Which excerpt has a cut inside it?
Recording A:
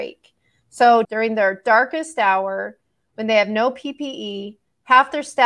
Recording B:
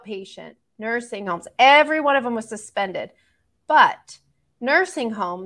A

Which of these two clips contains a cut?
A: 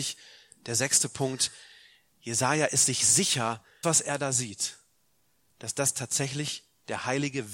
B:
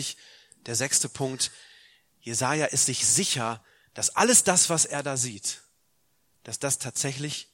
A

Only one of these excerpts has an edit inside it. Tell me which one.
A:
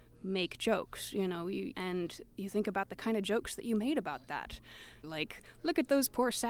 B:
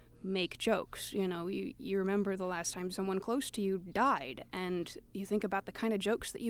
A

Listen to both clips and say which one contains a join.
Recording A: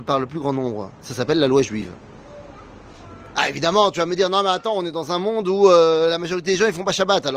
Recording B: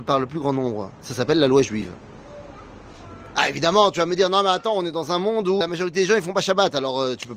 B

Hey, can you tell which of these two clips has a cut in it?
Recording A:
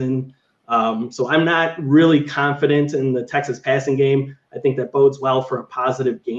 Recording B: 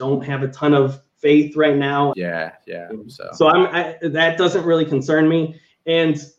B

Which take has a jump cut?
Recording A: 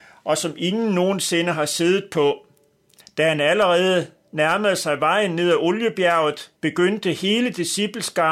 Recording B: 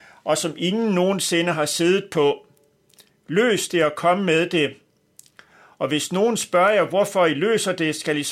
A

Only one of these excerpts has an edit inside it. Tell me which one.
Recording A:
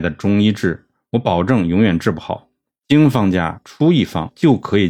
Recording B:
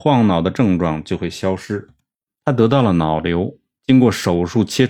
B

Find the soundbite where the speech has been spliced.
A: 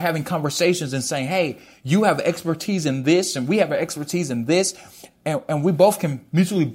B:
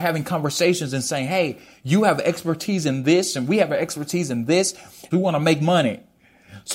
B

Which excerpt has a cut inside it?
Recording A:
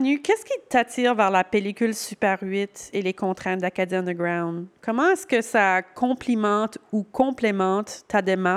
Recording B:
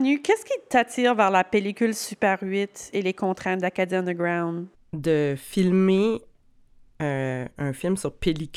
B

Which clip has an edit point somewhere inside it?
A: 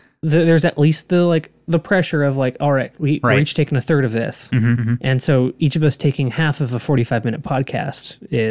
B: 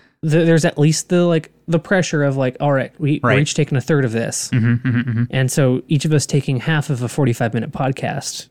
A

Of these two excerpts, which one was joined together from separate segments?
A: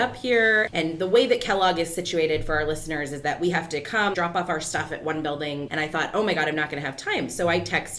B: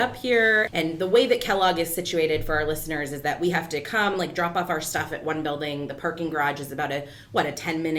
A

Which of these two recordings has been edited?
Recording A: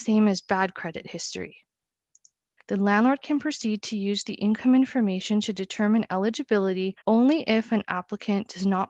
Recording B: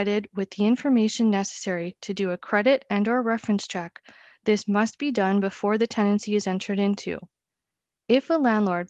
A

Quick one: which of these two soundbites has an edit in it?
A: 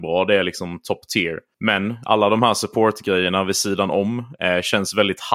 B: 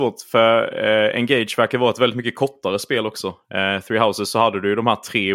A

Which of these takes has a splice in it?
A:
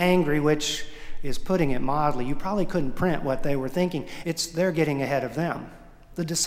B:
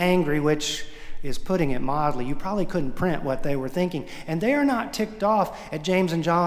A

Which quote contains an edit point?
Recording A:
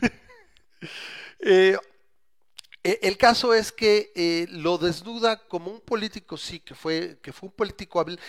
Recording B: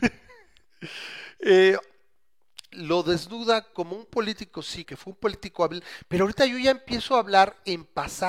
B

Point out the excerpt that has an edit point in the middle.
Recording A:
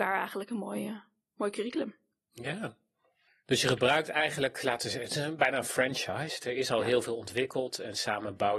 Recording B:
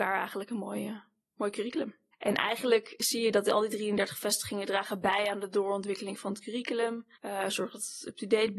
B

